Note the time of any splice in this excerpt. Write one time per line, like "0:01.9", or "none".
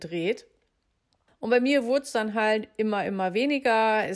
0:01.3